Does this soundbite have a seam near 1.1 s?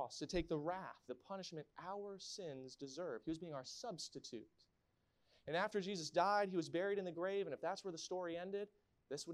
yes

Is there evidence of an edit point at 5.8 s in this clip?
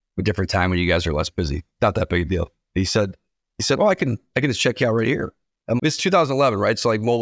yes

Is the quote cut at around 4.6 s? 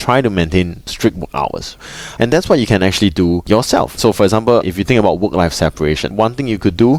no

